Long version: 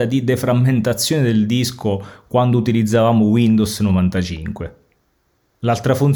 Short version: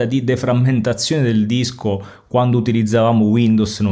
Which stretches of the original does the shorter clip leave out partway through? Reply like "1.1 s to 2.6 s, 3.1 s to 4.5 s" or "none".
none